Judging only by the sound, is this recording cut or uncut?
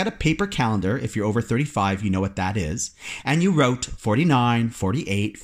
uncut